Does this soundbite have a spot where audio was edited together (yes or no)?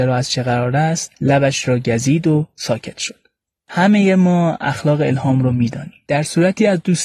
yes